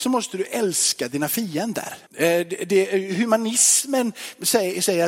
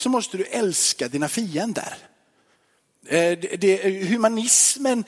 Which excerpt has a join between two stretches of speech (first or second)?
first